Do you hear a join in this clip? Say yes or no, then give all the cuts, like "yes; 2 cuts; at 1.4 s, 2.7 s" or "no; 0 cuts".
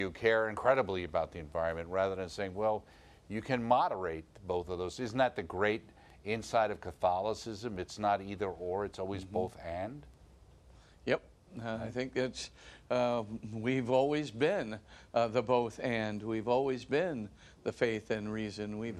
no; 0 cuts